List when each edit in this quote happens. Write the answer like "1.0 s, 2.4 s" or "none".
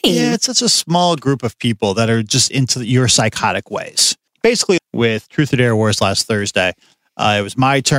4.8 s